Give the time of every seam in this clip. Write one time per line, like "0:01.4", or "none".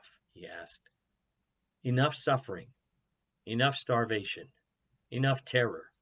none